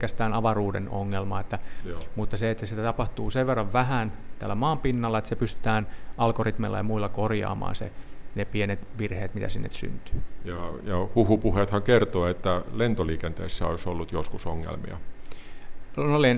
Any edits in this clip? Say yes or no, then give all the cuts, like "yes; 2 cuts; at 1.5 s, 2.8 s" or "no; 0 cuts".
yes; 1 cut; at 10.4 s